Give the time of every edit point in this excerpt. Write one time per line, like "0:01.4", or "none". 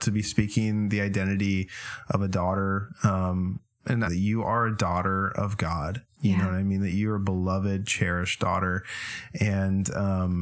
0:04.0